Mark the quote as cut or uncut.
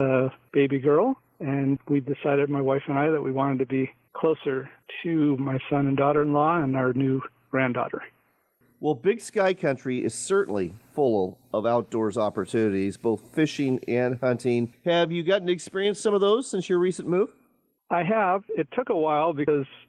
uncut